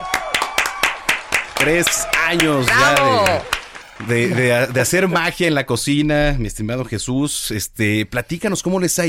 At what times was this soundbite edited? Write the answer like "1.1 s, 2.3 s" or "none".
none